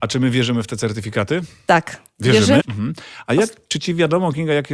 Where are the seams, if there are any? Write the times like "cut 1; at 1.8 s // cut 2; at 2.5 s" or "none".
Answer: cut 1; at 2.6 s